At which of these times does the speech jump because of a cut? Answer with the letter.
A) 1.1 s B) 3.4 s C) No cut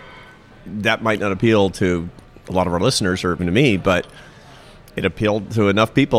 B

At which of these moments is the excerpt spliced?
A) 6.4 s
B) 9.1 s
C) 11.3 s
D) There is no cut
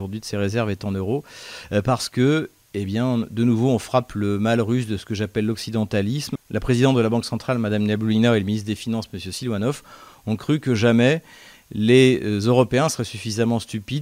D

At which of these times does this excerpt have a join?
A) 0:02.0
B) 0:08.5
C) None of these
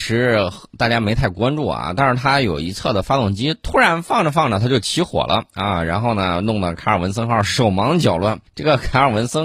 B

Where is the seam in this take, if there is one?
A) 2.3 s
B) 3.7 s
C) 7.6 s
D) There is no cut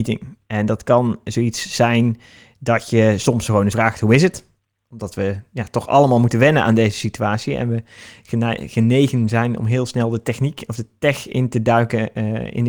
B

